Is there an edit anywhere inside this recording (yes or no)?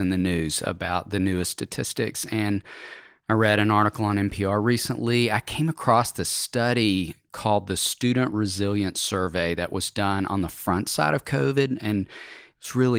no